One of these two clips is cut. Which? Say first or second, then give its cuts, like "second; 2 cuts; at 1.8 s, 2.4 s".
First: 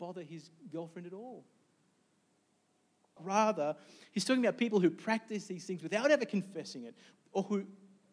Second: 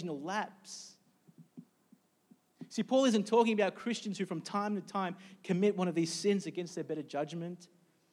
first; 2 cuts; at 3.2 s, 7.1 s